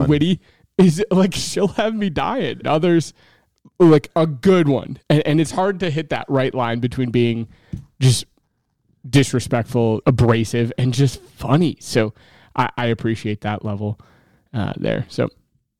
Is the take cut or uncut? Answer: cut